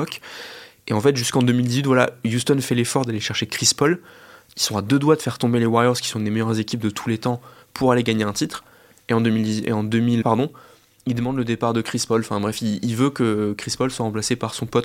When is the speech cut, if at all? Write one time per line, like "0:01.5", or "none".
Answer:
0:10.2